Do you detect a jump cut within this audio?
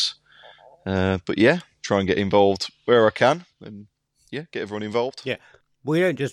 yes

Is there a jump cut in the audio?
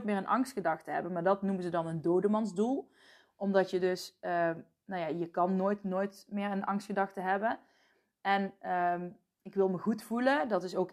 no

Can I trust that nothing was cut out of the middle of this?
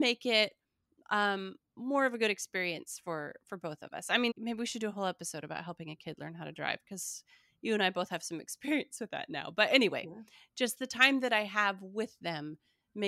no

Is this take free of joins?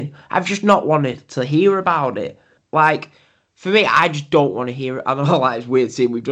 no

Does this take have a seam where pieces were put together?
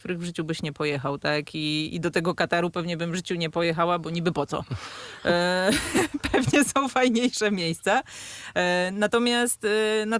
no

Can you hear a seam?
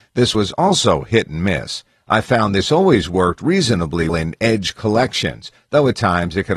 yes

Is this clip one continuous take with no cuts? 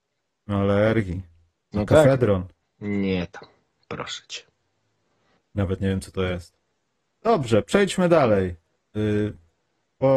yes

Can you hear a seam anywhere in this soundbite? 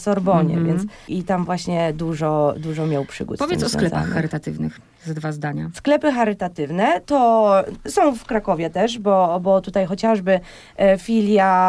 no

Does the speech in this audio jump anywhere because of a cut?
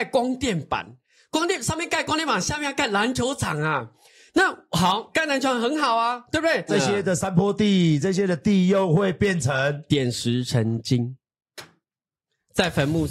yes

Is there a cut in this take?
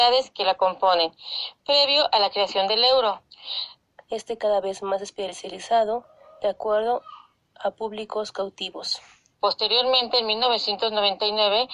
yes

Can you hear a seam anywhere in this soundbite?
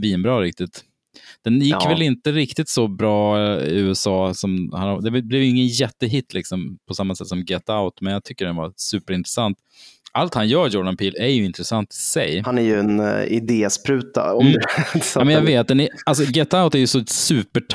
yes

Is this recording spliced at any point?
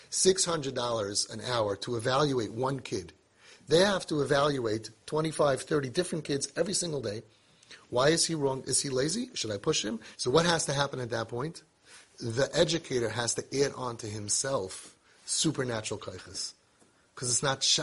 yes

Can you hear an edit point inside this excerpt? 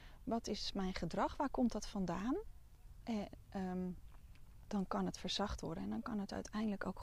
yes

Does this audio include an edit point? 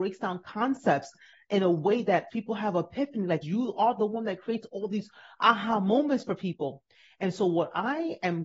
yes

